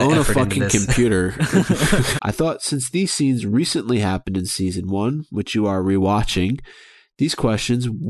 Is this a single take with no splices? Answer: no; 1 cut; at 2.2 s

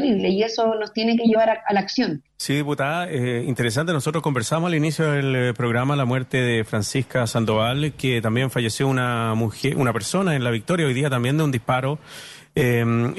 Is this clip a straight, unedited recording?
no; 1 cut; at 2.3 s

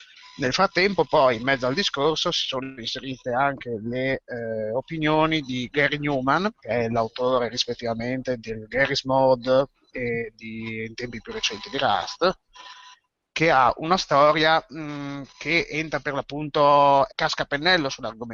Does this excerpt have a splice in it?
yes; 2 cuts; at 6.6 s, 17.1 s

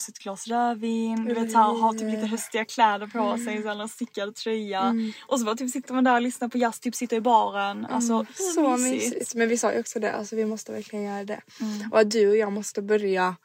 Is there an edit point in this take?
no; 0 cuts

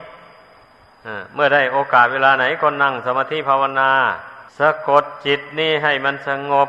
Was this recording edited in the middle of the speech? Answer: yes; 1 cut; at 4.5 s

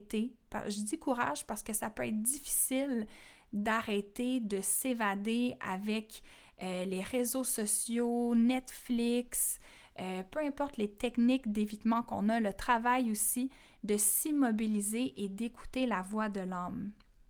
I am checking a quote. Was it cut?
no; 0 cuts

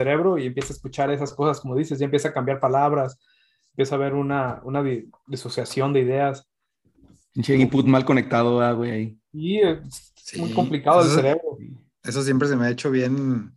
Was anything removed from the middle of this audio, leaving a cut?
no; 0 cuts

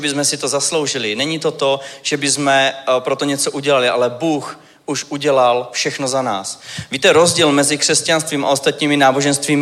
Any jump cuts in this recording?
no; 0 cuts

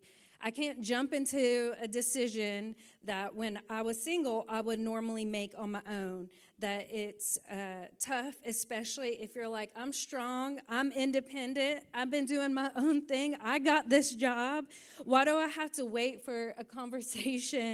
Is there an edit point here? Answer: no; 0 cuts

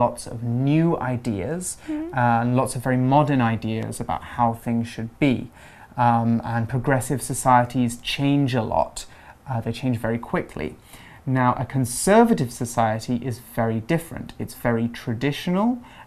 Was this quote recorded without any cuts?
yes; 0 cuts

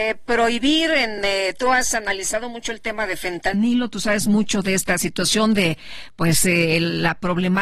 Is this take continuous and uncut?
yes; 0 cuts

